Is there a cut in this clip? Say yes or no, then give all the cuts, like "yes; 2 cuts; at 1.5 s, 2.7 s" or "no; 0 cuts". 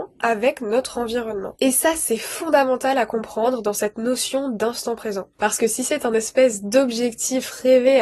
yes; 1 cut; at 5.3 s